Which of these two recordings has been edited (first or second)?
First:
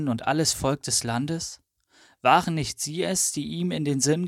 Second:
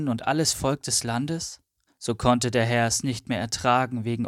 second